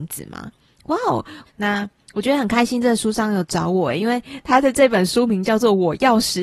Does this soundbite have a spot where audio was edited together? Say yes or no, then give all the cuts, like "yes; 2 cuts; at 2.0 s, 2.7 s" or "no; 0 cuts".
yes; 1 cut; at 1.5 s